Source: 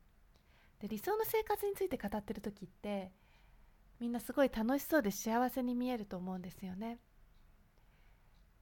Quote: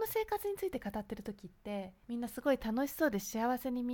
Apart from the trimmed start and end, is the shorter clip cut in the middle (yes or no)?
yes